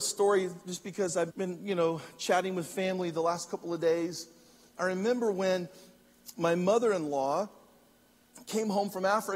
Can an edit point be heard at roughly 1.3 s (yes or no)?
yes